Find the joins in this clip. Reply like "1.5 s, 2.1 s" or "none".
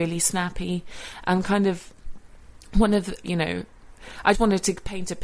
3.2 s, 4.3 s